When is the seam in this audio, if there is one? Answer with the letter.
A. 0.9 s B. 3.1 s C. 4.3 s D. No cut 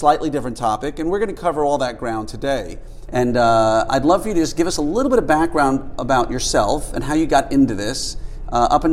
B